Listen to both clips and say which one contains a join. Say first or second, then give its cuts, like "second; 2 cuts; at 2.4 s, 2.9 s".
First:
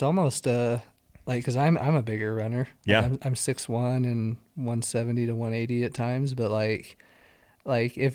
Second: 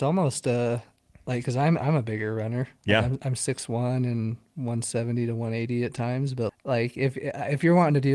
second; 1 cut; at 6.5 s